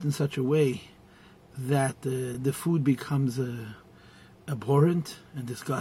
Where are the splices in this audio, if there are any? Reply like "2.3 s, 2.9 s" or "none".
none

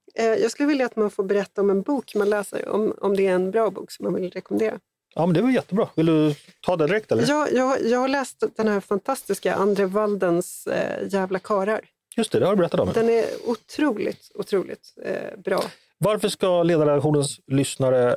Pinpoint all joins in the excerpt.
none

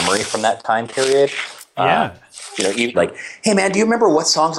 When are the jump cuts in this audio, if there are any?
2.9 s

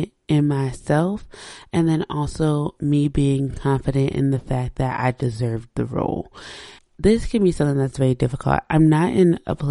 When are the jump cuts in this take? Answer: 6.8 s

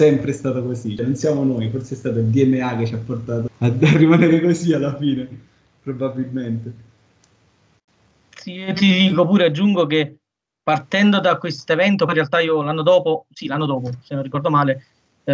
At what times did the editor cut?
1.0 s, 3.5 s

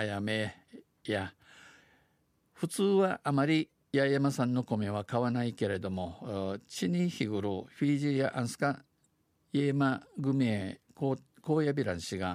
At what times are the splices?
none

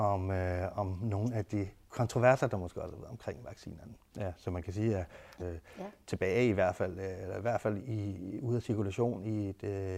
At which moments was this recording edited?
4.1 s, 5.4 s, 7.8 s

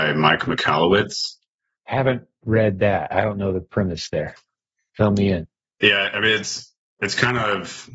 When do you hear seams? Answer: none

